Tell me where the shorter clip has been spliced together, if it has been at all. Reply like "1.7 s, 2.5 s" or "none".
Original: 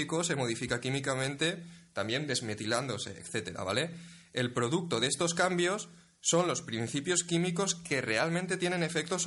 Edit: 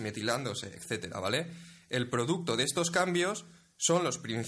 none